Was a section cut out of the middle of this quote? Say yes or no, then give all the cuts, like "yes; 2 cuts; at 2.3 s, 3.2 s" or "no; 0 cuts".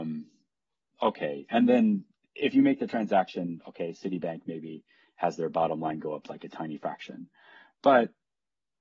no; 0 cuts